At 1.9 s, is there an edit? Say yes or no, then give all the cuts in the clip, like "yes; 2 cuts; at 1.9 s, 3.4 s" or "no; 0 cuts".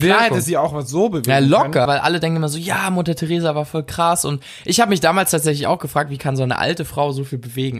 yes; 1 cut; at 1.9 s